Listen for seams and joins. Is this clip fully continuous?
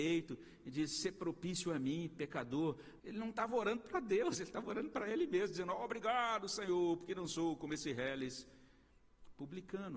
no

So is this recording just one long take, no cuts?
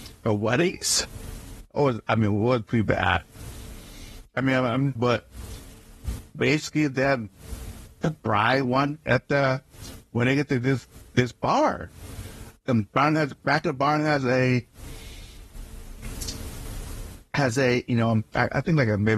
no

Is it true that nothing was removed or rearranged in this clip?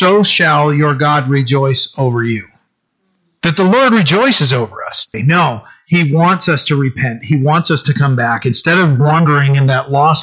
no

